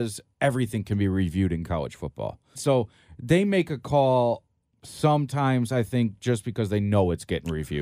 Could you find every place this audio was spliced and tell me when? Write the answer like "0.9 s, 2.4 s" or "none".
2.5 s